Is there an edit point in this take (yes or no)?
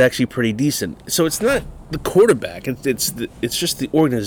no